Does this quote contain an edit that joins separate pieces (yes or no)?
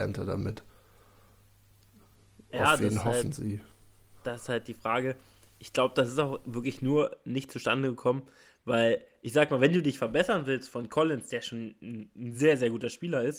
no